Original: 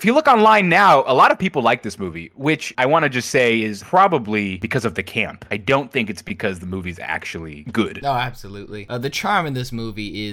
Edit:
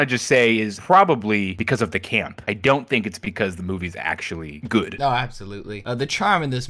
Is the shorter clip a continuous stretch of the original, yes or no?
yes